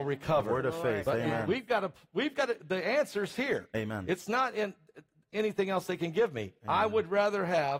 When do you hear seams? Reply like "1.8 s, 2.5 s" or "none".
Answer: none